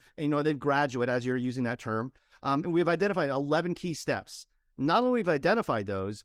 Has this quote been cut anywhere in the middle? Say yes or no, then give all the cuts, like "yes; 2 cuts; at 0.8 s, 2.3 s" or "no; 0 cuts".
no; 0 cuts